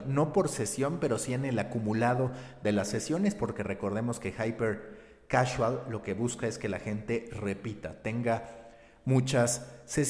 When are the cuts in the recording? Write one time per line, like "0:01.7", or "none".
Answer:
none